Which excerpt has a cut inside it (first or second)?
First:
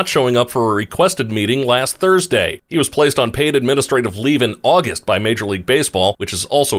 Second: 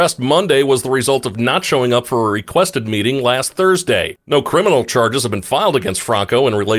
first